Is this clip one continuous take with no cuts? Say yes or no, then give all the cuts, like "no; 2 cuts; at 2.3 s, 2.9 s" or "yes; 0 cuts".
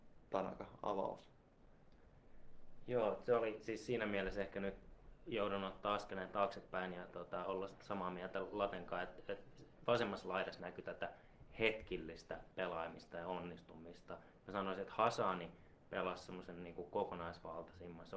yes; 0 cuts